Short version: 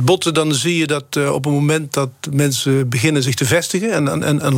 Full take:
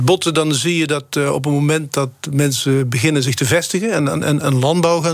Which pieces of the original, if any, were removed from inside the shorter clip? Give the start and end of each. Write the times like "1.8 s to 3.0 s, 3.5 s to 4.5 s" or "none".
none